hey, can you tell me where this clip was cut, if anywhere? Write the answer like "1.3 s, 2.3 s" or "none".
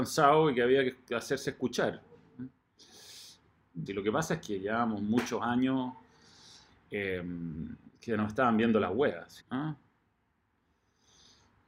3.9 s, 7.9 s, 9.4 s